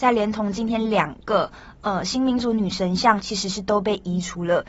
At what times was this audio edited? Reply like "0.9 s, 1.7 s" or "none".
3.2 s